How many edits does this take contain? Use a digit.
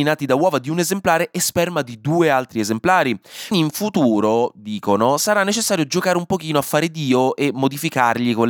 1